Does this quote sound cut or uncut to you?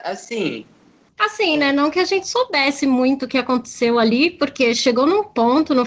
cut